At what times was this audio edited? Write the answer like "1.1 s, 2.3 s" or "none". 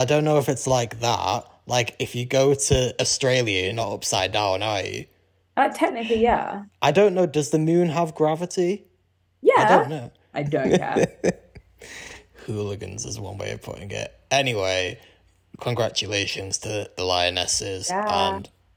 10.3 s